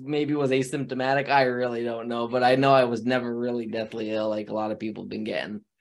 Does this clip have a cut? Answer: no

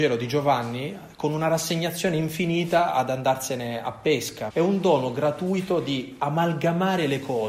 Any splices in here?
yes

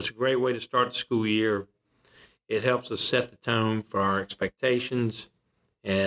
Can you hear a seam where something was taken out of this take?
no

